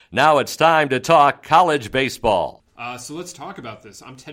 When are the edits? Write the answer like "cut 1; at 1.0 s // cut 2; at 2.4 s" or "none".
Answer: cut 1; at 2.7 s